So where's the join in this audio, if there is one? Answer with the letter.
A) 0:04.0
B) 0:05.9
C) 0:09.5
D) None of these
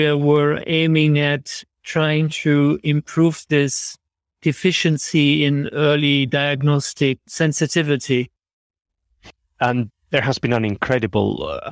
D